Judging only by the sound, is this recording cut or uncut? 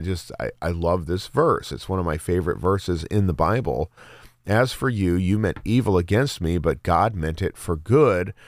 uncut